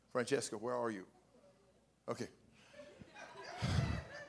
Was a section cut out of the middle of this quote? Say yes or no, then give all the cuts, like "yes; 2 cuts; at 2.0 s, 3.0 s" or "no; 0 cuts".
no; 0 cuts